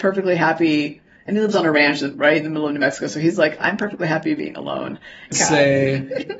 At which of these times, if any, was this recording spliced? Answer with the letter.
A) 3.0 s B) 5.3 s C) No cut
B